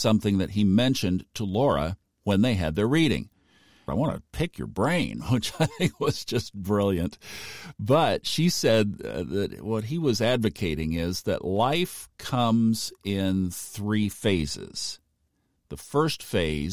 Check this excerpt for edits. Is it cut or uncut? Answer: cut